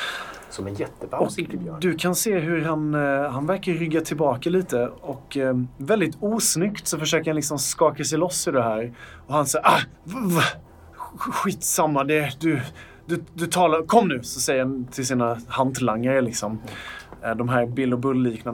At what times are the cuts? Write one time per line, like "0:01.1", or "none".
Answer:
0:09.9

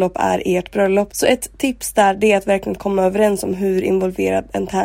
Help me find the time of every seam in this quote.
0:01.1

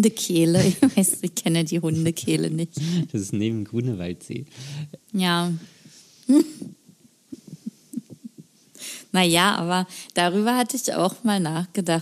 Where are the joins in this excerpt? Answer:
0:05.0

